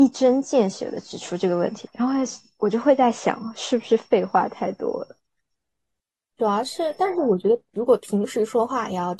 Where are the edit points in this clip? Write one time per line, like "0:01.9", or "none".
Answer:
0:01.9
0:06.3